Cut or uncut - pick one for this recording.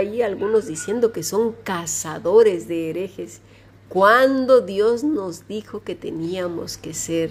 uncut